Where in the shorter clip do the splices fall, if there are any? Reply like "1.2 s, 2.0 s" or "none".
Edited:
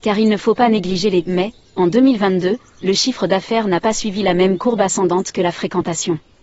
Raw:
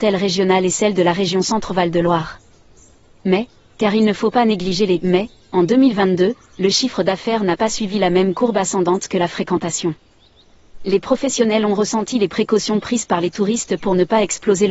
none